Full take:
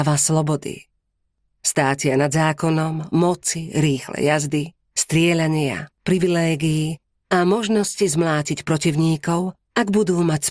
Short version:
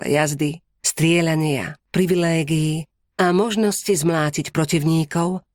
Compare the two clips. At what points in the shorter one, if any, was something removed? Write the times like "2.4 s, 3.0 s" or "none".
none